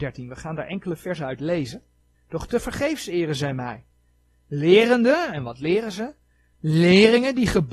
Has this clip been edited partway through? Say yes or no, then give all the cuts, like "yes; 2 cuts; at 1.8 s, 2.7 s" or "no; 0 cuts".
yes; 1 cut; at 2.1 s